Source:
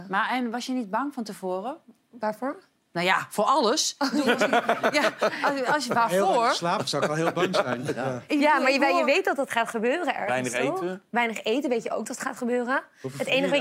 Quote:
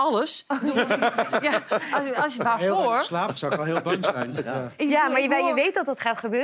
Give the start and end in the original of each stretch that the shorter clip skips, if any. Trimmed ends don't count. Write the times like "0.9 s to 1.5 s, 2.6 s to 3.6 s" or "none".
none